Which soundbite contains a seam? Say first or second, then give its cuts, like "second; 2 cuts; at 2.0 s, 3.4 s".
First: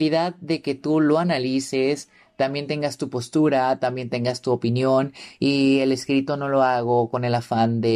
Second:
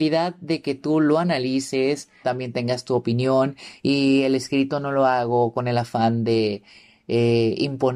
second; 1 cut; at 2.2 s